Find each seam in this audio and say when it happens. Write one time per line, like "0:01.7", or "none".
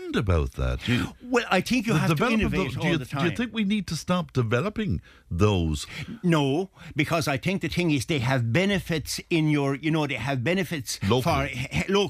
none